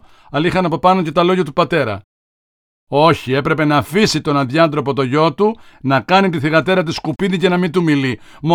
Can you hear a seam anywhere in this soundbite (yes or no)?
no